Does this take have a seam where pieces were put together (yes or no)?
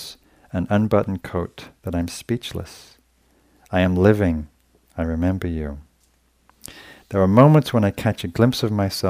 no